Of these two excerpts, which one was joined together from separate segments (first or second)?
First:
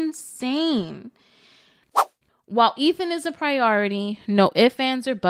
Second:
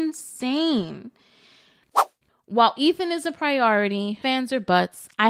second